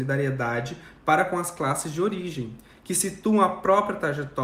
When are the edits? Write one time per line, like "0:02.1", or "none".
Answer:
none